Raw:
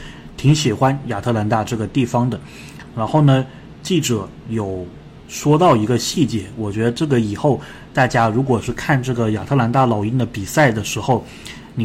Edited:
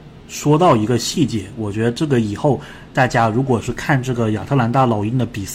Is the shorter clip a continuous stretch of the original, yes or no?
yes